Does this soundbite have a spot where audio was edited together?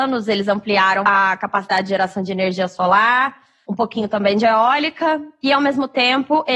yes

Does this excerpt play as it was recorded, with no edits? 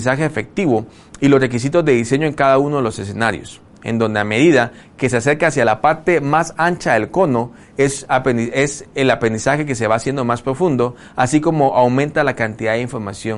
yes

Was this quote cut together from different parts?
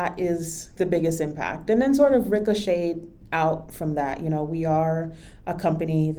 no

